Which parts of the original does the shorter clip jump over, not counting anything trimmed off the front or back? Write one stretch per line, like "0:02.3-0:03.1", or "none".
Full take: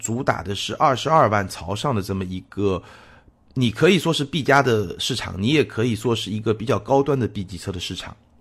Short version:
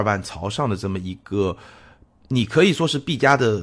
none